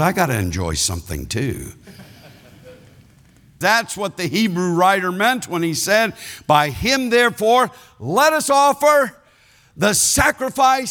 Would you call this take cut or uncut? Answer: cut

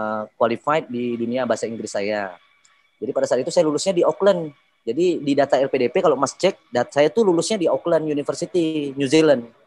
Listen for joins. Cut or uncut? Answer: uncut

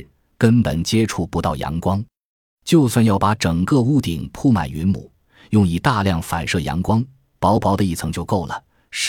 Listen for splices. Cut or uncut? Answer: uncut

